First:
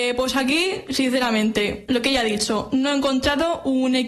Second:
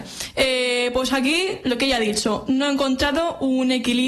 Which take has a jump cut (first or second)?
second